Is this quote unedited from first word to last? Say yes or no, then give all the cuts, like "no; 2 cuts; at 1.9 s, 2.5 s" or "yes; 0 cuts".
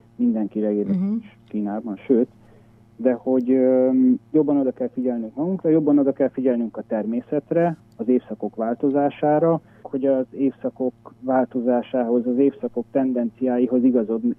no; 2 cuts; at 7.8 s, 9.8 s